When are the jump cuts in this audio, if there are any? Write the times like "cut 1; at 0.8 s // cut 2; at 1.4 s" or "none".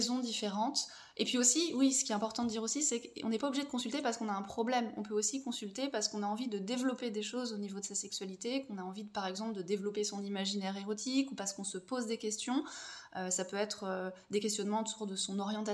none